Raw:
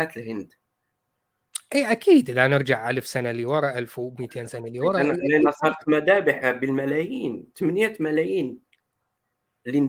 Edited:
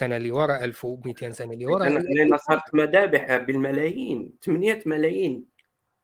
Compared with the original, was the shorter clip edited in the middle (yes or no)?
no